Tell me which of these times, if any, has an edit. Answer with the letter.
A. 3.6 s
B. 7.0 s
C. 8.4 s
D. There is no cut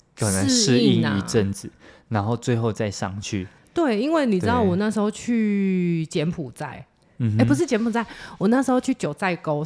A